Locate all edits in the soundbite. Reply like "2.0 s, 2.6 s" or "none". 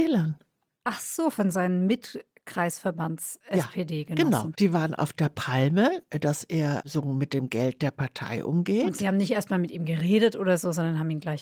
4.5 s